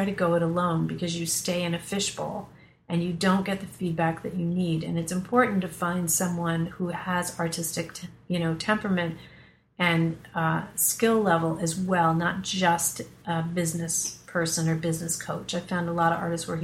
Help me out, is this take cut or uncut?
uncut